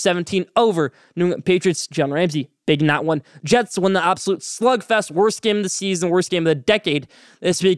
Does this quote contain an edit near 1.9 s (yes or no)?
no